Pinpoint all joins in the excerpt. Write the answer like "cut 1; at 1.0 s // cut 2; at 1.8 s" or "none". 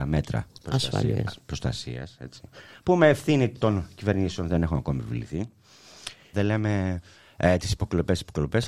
cut 1; at 6.3 s